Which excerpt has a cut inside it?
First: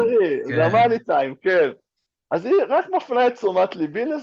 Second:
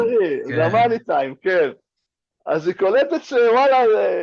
first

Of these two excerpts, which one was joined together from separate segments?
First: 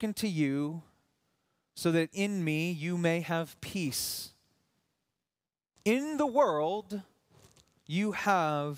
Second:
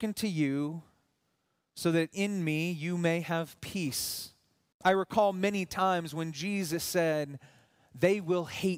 second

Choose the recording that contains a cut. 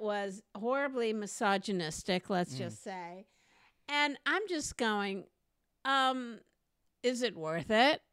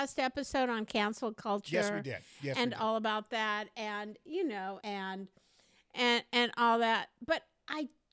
second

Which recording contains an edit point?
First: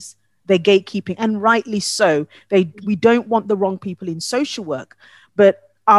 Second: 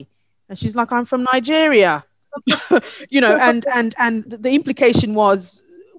second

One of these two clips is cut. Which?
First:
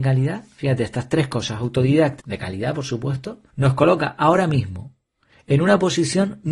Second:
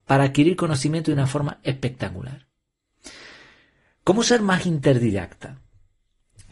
first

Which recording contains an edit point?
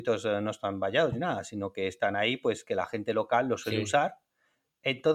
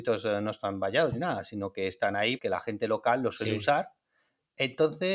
second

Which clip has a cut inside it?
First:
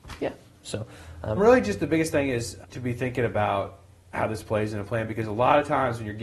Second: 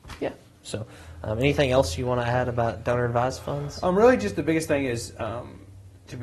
first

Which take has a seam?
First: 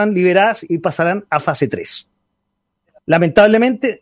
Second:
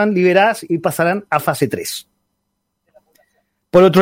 first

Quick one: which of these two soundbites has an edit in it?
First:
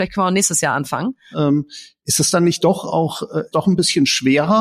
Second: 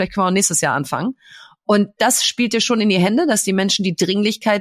first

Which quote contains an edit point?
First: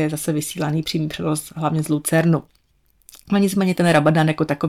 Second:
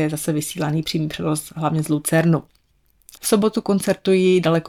second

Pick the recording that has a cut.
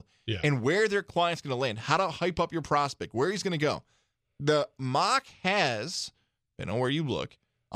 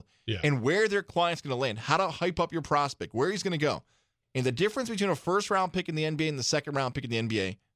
second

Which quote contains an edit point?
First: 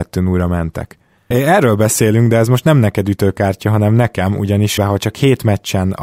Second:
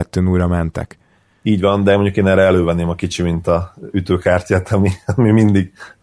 first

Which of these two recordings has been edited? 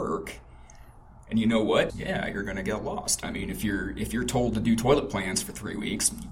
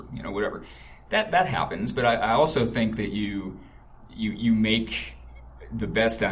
first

